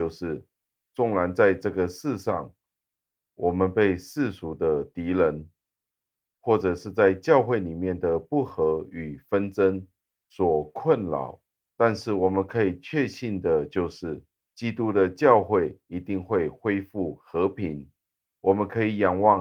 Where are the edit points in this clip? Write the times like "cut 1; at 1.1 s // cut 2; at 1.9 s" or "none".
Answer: none